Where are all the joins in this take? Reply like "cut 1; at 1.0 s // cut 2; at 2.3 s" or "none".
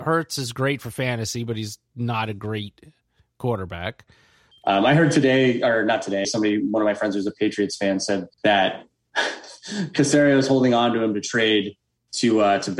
cut 1; at 4.5 s // cut 2; at 6.2 s // cut 3; at 8.3 s